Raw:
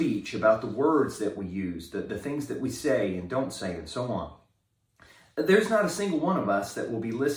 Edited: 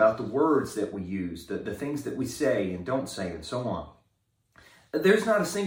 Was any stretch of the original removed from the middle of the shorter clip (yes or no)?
no